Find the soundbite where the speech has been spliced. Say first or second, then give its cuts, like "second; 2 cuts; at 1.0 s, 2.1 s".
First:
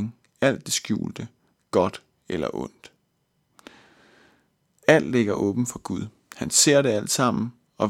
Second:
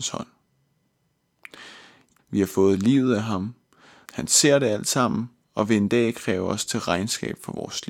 second; 2 cuts; at 2.2 s, 4.1 s